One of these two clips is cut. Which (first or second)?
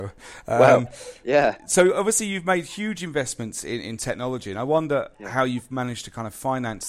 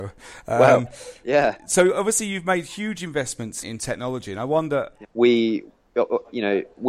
second